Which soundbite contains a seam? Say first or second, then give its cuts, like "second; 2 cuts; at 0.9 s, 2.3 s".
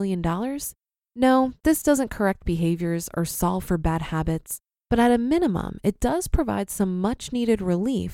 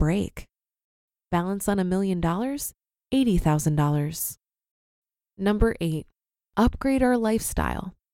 first; 1 cut; at 1.0 s